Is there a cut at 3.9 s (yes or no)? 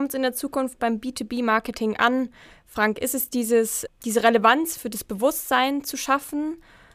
yes